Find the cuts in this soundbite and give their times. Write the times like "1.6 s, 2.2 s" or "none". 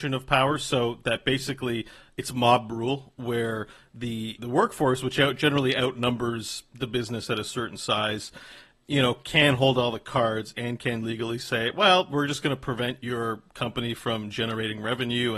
4.4 s